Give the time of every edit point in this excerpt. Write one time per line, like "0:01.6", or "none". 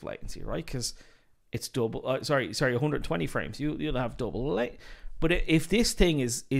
none